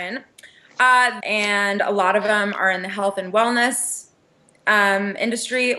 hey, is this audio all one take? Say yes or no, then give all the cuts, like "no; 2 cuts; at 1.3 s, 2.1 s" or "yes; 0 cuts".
no; 1 cut; at 1.2 s